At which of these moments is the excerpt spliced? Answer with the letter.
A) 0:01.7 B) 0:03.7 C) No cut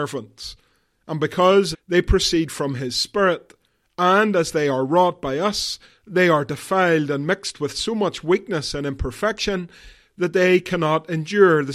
A